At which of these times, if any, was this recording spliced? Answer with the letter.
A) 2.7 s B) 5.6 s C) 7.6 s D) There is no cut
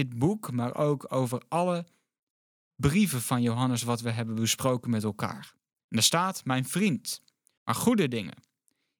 C